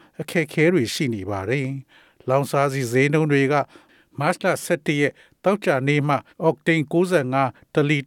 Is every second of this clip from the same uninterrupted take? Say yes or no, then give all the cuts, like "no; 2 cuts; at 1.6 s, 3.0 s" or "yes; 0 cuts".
no; 1 cut; at 6.3 s